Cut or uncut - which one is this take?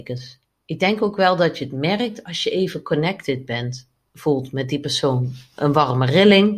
uncut